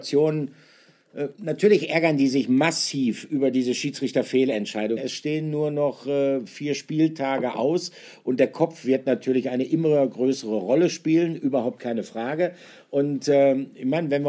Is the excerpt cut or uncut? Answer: cut